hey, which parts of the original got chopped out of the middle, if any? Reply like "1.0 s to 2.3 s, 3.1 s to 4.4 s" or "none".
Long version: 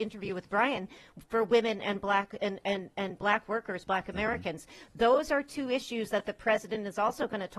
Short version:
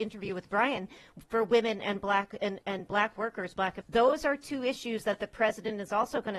2.6 s to 2.9 s, 4.1 s to 4.9 s

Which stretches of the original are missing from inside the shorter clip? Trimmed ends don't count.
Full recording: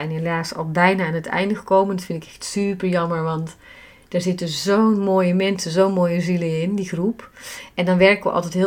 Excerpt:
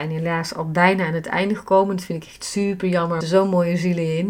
3.2 s to 5.6 s

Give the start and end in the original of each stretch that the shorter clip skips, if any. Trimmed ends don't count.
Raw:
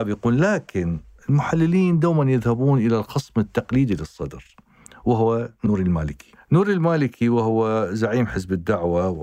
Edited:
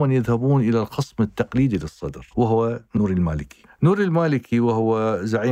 4.5 s to 5.0 s

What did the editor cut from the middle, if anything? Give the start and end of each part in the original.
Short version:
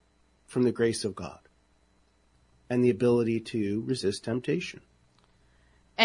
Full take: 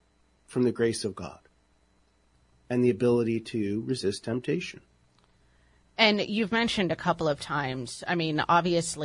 none

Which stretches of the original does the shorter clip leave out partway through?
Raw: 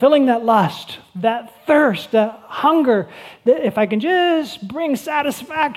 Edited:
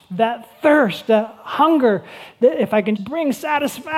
4.0 s to 4.6 s

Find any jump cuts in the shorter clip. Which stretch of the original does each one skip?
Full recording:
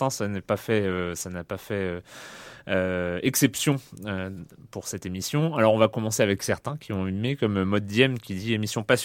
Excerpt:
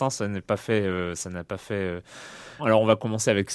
2.6 s to 5.5 s

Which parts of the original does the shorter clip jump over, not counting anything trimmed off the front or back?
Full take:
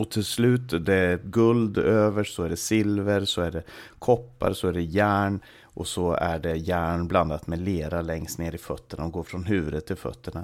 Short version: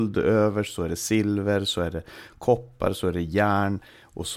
none

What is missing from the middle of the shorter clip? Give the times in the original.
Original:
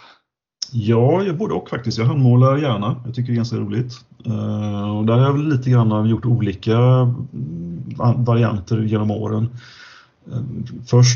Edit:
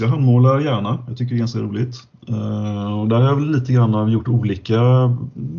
none

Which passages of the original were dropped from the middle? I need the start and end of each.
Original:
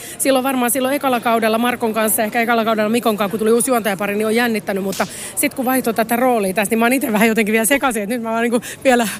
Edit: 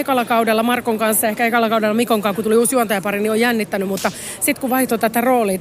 none

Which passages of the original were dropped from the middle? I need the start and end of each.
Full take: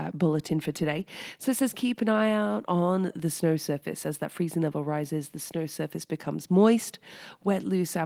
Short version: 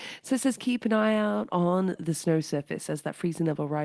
none

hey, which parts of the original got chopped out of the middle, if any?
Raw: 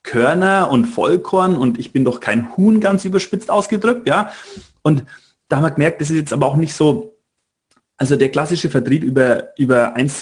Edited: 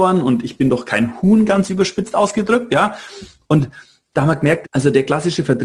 6.0 s to 7.9 s

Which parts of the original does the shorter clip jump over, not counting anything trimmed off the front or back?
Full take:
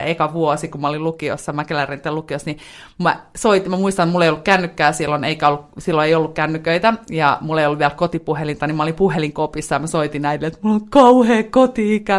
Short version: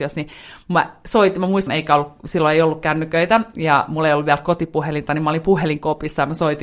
4.0 s to 5.2 s

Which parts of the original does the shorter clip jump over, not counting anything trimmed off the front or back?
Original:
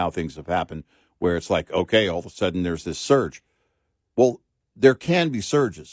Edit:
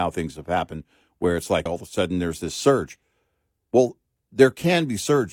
1.7 s to 2.1 s

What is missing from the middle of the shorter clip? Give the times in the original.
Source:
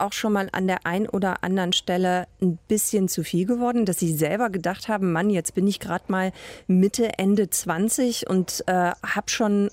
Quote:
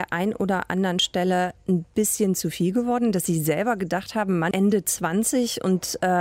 5.2 s to 7.2 s

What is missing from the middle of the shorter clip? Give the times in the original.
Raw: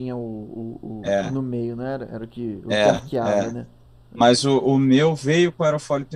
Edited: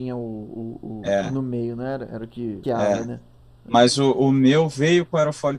2.6 s to 3.1 s

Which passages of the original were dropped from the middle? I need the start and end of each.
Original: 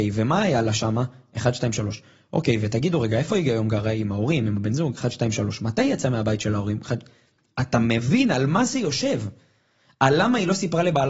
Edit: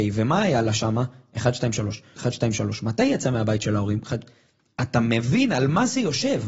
2.2 s to 5.0 s

